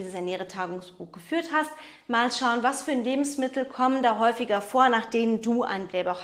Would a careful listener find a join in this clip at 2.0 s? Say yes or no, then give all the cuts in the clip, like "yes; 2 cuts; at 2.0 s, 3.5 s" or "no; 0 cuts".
no; 0 cuts